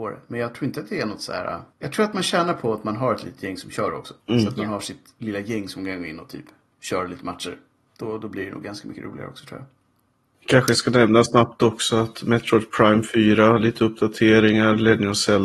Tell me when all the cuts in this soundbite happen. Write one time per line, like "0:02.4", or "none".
0:01.7
0:04.2